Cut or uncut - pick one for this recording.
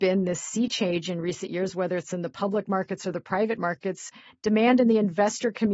uncut